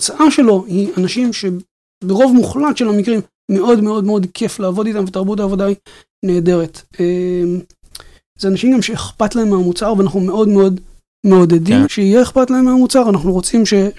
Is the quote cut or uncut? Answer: cut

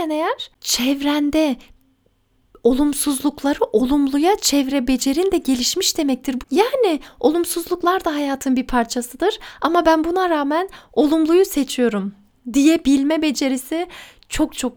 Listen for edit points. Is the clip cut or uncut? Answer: cut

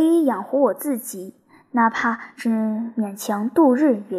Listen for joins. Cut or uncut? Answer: uncut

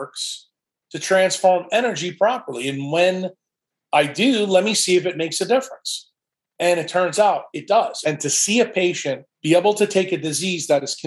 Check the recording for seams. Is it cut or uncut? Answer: cut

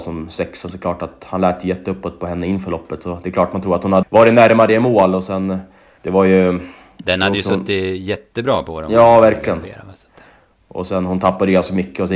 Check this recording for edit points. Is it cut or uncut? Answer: cut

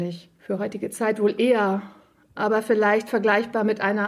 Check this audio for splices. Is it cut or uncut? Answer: uncut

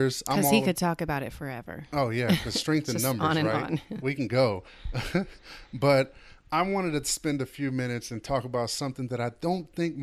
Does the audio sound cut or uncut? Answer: uncut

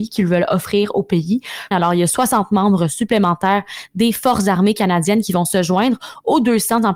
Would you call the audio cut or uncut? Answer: cut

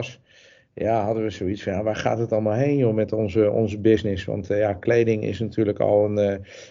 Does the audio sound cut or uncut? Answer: uncut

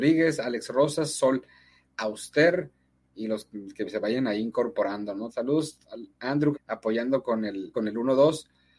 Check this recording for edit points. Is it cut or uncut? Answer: cut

